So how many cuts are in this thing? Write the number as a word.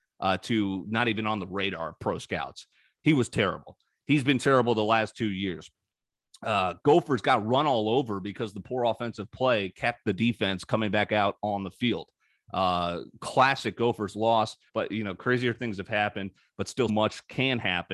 two